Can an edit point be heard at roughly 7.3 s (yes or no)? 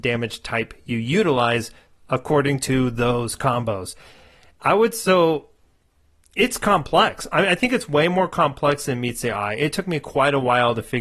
no